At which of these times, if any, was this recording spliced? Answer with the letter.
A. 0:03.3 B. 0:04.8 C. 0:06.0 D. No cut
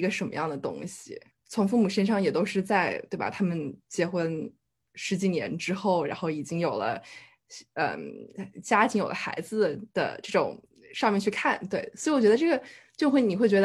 D